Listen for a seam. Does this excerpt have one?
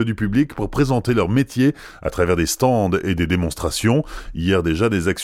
no; 0 cuts

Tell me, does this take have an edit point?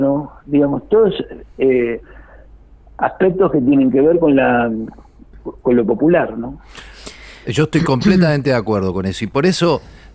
no; 0 cuts

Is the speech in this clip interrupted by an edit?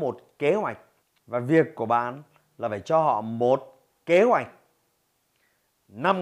yes; 1 cut; at 1.2 s

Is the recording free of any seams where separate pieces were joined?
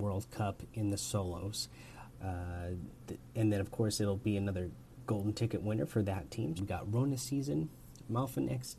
no; 2 cuts; at 2.1 s, 6.6 s

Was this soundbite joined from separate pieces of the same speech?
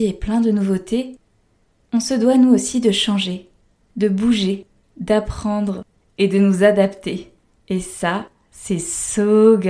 no; 0 cuts

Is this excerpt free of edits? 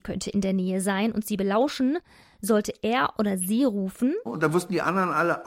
no; 1 cut; at 4.3 s

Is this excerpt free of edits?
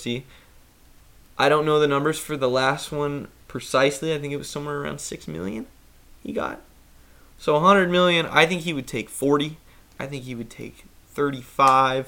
yes; 0 cuts

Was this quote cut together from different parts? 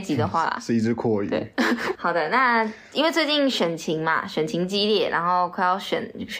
yes; 1 cut; at 2.0 s

